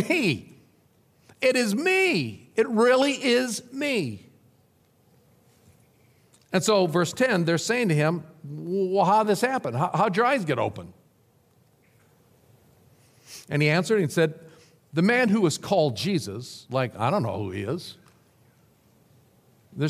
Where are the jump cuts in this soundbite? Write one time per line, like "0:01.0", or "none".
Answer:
none